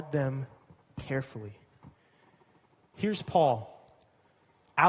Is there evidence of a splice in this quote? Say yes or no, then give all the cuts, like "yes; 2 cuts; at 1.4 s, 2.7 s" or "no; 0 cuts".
no; 0 cuts